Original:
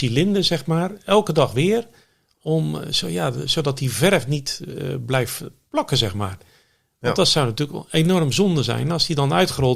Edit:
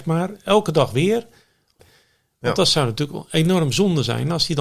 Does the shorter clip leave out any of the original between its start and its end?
yes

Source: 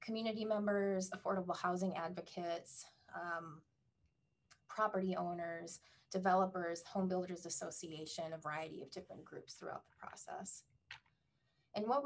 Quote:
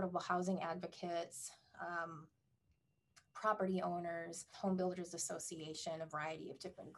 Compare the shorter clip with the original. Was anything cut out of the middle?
yes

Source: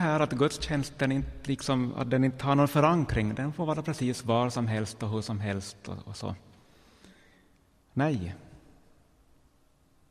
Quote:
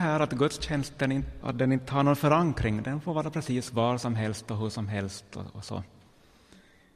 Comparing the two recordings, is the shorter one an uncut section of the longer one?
no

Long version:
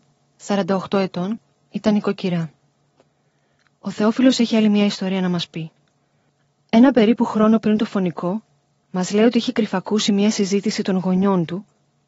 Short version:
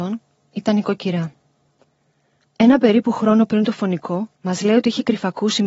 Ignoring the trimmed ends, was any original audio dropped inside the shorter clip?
yes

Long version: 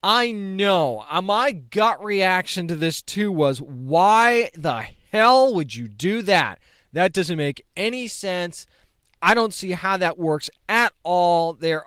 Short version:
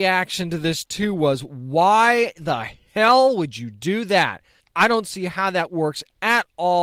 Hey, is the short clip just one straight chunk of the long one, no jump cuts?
no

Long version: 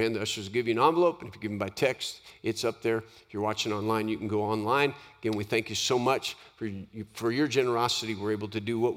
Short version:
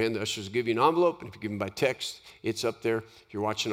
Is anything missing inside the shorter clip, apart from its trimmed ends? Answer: no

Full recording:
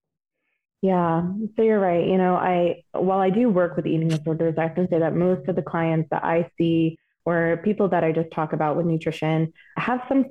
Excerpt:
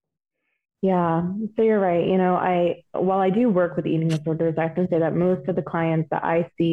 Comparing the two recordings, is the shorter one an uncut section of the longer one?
yes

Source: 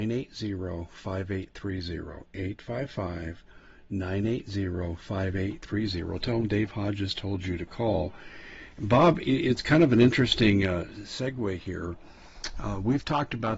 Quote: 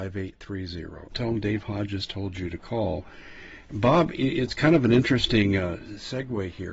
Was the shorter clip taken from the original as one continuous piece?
no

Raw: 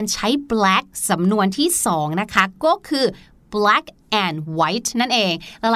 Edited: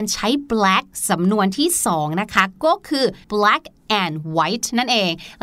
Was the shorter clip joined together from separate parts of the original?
yes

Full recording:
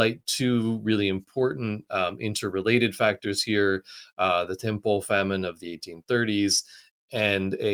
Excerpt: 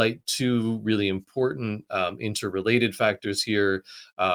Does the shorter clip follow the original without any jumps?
yes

